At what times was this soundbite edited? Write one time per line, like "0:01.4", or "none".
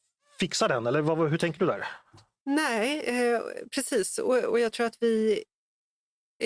none